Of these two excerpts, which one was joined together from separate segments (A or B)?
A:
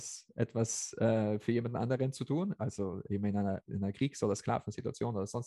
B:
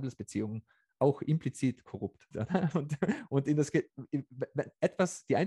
B